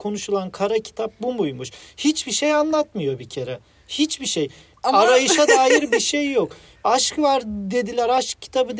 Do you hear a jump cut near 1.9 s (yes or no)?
no